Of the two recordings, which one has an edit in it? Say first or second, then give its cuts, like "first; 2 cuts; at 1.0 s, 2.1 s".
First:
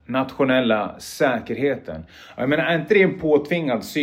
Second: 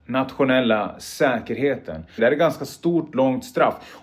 second; 1 cut; at 2.2 s